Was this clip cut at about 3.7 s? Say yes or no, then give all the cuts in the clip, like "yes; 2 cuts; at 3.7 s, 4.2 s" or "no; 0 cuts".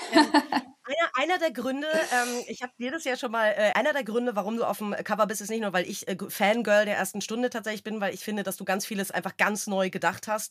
yes; 1 cut; at 3.7 s